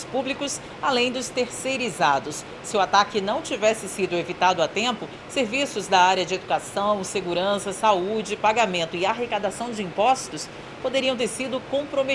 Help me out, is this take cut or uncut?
uncut